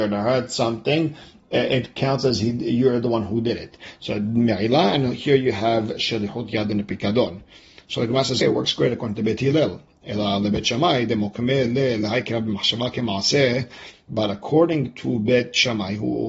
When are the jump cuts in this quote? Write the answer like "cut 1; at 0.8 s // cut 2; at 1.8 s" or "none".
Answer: cut 1; at 8.4 s